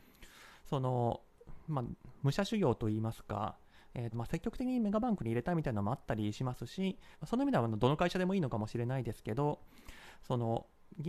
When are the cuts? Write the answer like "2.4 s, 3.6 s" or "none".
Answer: 4.1 s, 7.1 s